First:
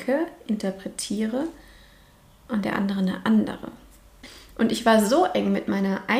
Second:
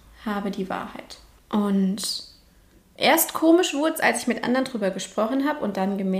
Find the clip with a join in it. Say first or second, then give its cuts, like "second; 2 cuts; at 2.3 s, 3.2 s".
second; 1 cut; at 1.3 s